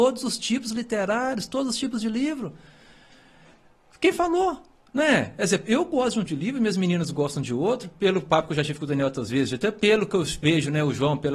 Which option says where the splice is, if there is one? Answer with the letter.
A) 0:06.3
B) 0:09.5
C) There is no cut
A